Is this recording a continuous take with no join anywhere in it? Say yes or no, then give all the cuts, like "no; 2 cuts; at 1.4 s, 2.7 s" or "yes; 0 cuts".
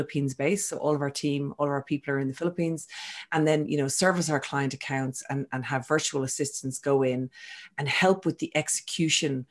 yes; 0 cuts